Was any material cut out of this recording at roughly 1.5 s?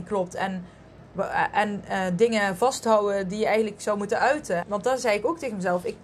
no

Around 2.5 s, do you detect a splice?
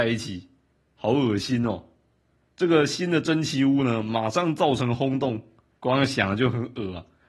yes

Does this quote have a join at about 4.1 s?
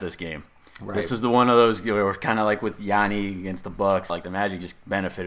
yes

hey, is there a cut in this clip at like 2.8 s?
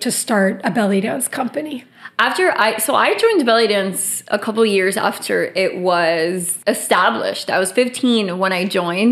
no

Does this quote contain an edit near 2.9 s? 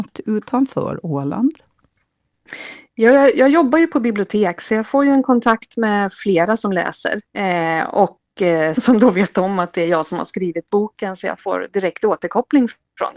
no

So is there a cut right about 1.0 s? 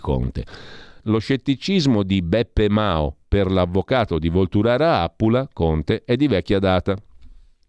yes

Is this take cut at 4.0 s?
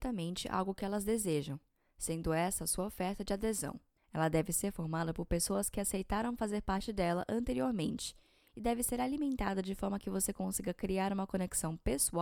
yes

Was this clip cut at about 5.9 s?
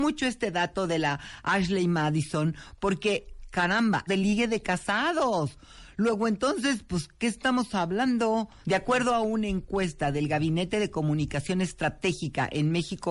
no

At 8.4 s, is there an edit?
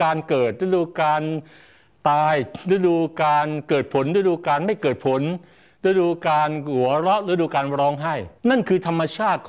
yes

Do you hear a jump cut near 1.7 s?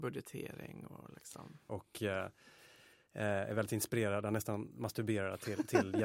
yes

